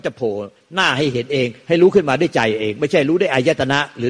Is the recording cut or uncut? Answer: uncut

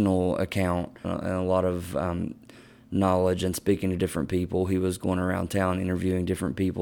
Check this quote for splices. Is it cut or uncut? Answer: cut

